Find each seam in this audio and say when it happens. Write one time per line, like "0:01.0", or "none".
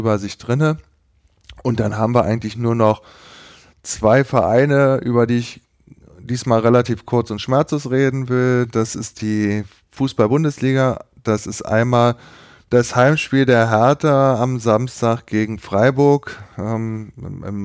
none